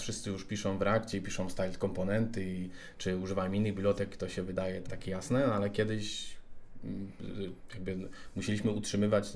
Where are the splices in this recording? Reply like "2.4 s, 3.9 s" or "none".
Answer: 4.8 s